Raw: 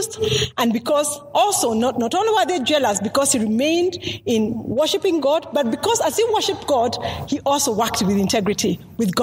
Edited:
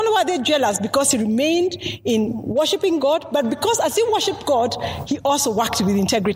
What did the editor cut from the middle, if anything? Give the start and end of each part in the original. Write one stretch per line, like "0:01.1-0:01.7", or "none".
none